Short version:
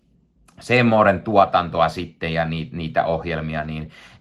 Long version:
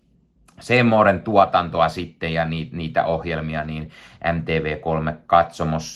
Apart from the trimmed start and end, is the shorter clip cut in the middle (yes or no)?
no